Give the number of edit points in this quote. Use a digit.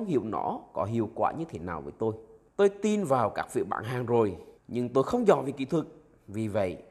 2